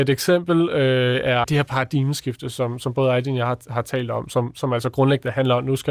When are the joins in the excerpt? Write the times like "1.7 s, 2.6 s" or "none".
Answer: 1.4 s